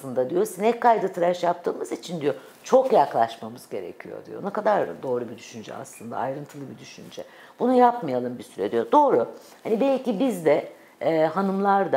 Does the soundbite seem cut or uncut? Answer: uncut